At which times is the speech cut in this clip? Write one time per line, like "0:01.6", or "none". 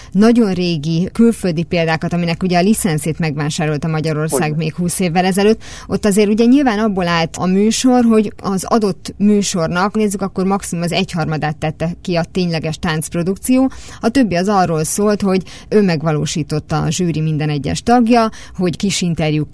0:09.9